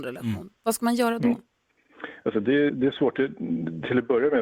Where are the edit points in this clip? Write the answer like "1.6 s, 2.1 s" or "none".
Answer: 2.7 s